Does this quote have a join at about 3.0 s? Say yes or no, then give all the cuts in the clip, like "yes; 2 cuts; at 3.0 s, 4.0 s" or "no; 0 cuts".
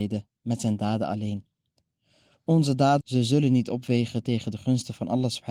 yes; 1 cut; at 3.0 s